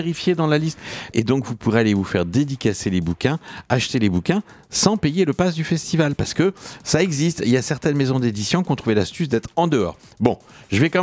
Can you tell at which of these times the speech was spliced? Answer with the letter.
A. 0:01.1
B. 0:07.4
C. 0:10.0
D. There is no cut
A